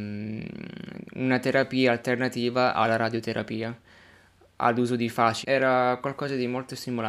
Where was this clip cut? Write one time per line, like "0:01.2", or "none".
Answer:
0:05.4